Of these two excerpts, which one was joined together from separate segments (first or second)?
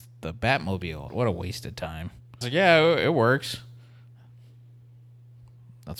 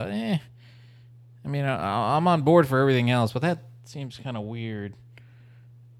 first